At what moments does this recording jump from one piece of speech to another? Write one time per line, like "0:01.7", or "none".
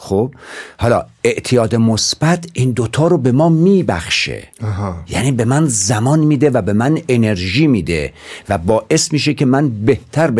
0:04.5